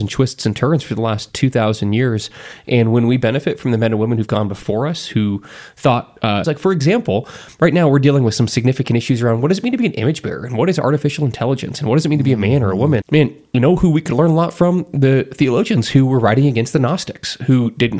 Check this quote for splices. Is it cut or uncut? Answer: cut